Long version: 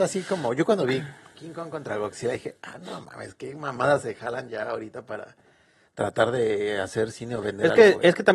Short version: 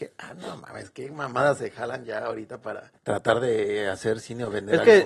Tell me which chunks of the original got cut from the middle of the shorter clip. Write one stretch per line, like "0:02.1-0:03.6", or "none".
0:05.4-0:05.9